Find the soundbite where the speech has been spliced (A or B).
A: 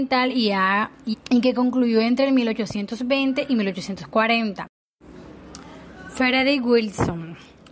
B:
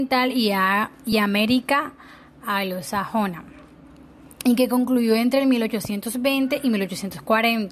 A